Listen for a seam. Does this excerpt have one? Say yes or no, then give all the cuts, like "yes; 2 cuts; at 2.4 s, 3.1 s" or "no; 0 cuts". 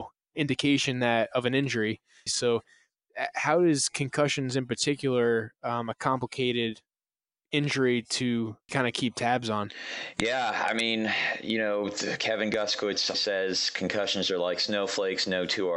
yes; 3 cuts; at 2.3 s, 8.7 s, 13.1 s